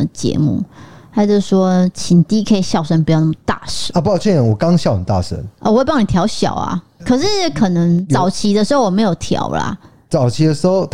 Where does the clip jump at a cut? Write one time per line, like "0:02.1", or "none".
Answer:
0:07.0